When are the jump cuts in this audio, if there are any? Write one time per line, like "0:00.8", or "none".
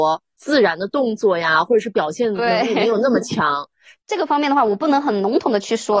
0:04.0